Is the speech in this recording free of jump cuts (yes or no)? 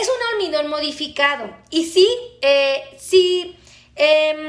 yes